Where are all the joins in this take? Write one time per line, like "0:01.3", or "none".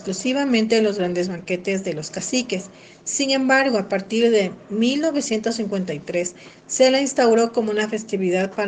none